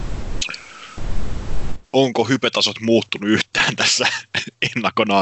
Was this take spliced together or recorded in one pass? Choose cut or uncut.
cut